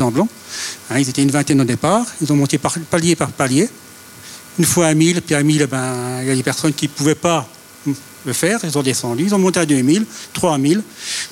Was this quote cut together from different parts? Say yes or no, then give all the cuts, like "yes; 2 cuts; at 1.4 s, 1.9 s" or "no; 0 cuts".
no; 0 cuts